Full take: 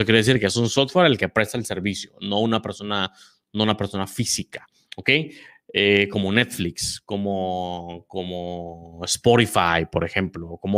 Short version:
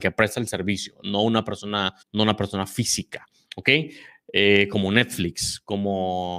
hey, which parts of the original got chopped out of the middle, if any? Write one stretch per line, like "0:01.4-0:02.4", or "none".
0:03.2-0:03.4